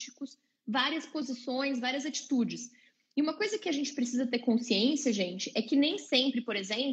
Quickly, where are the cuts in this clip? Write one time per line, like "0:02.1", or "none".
none